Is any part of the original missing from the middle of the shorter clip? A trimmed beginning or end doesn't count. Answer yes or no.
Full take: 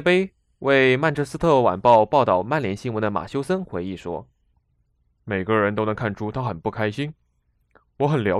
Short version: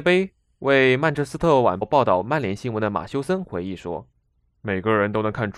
yes